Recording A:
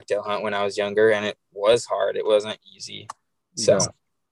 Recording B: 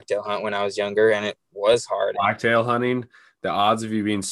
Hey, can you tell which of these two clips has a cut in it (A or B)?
B